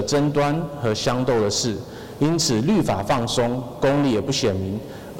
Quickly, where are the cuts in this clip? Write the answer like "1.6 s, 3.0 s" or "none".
none

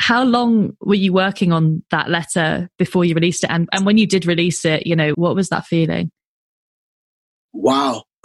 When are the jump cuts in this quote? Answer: 5.1 s

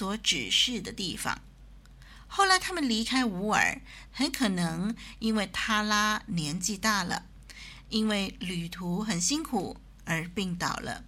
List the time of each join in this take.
4.1 s

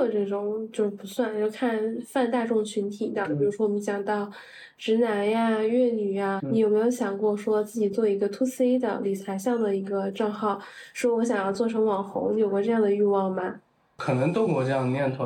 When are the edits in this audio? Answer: 6.4 s

